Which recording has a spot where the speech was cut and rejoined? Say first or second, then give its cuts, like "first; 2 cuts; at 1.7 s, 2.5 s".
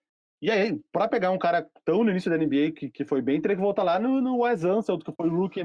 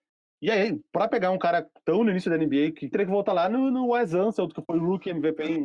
second; 1 cut; at 2.9 s